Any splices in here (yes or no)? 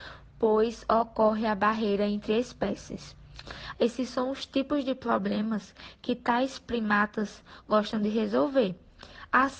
yes